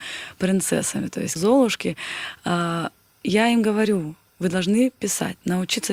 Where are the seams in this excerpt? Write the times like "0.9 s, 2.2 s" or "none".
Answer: 1.4 s